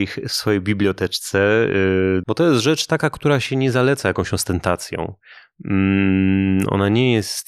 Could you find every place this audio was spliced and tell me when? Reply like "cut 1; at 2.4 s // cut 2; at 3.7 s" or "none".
cut 1; at 2.2 s